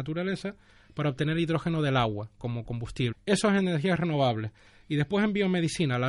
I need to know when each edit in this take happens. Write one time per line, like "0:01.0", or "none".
0:03.1

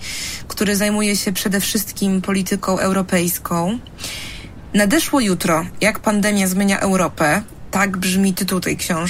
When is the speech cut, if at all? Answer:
none

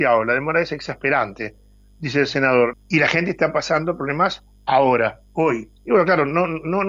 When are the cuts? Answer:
0:02.7
0:05.8

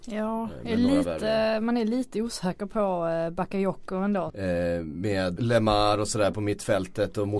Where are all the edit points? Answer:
0:04.3
0:05.4

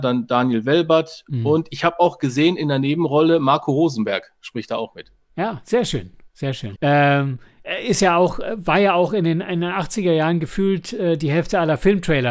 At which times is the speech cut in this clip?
0:06.7

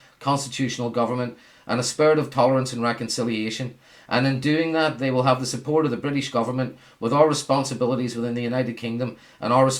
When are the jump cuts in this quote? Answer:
none

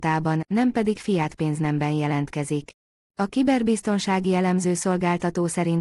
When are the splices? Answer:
0:03.0

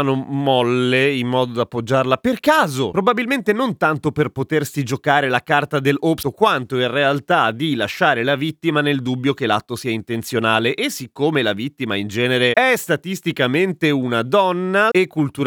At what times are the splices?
0:02.9
0:06.2

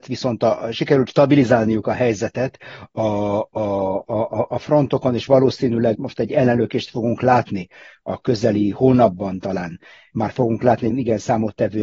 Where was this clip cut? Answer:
0:06.0
0:10.9

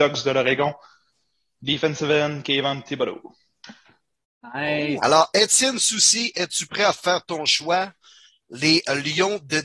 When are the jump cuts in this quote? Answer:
0:05.0

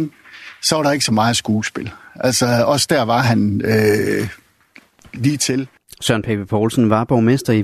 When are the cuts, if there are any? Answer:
none

